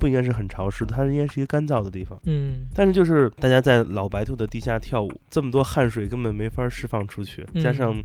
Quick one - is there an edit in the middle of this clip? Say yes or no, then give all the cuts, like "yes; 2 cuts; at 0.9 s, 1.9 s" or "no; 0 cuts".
no; 0 cuts